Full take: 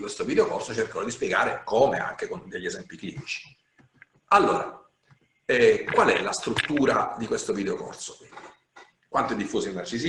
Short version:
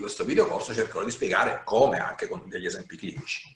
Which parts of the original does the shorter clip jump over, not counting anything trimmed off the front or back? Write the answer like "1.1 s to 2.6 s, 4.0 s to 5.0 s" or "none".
none

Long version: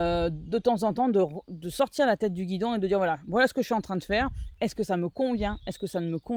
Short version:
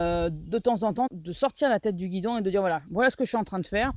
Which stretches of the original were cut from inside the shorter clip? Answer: 1.1 s to 1.4 s

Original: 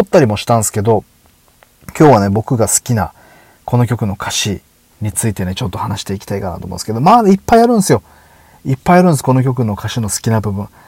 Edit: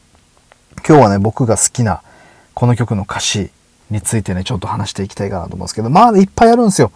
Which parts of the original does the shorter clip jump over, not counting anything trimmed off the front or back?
none

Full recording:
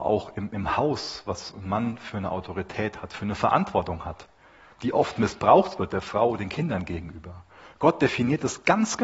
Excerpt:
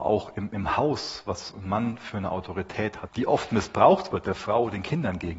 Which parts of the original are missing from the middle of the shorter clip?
3.1 s to 4.7 s

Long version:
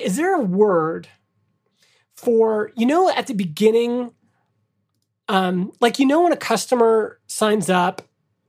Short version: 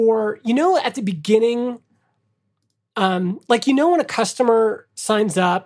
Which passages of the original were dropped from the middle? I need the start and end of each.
none

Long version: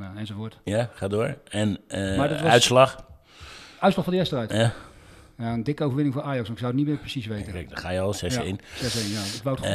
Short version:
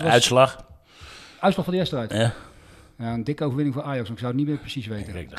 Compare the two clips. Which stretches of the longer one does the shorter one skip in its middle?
none

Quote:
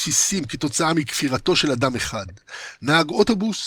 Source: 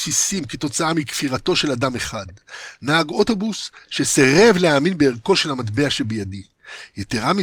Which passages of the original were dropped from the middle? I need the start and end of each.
none

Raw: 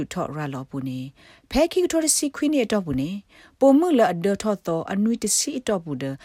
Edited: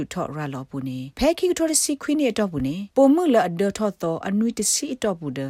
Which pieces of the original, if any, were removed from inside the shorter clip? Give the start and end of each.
1.1 s to 1.5 s, 3.2 s to 3.6 s

